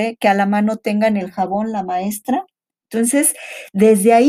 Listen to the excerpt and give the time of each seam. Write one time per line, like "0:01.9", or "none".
none